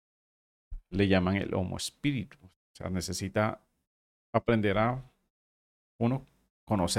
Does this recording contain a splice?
no; 0 cuts

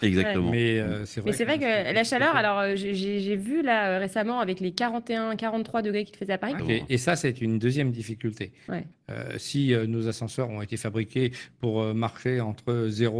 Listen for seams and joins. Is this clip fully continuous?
no; 2 cuts; at 6.6 s, 8.9 s

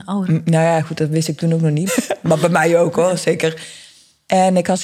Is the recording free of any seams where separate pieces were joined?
no; 1 cut; at 1.9 s

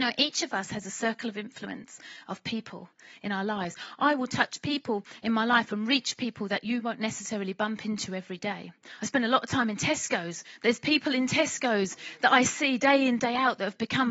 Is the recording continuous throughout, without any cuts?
yes; 0 cuts

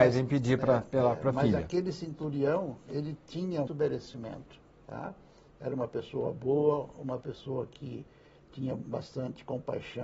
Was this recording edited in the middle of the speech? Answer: yes; 1 cut; at 3.7 s

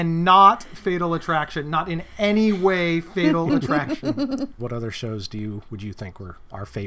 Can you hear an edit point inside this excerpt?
yes; 1 cut; at 4.6 s

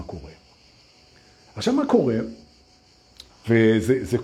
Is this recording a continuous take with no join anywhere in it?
no; 1 cut; at 3.3 s

